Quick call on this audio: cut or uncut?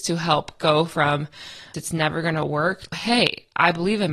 cut